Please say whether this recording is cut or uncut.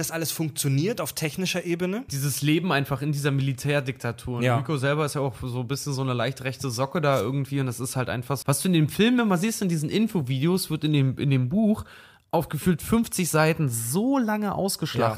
cut